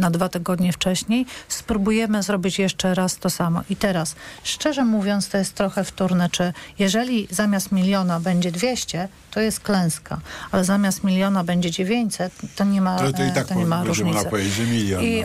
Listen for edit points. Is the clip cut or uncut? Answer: uncut